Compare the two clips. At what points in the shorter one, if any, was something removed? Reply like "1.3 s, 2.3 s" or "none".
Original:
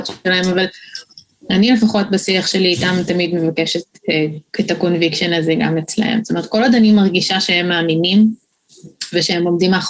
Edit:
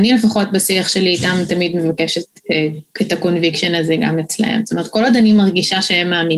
none

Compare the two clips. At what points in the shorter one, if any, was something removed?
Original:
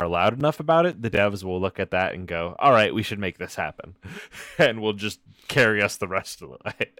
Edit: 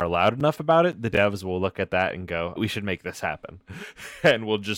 2.6 s

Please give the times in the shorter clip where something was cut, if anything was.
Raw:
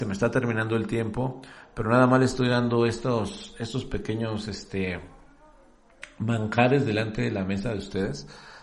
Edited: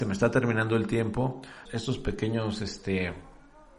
1.7 s

